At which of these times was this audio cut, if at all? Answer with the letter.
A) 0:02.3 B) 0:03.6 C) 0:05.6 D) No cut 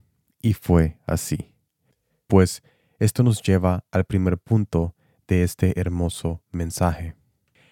A